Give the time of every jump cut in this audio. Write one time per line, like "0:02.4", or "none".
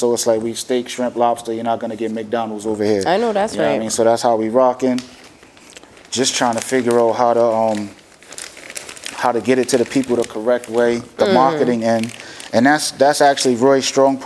0:06.1